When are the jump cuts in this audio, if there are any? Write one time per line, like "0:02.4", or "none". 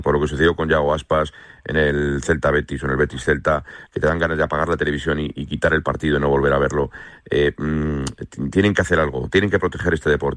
0:03.9